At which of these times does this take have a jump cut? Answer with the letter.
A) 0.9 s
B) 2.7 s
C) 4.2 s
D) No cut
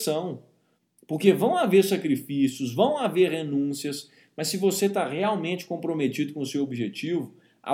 D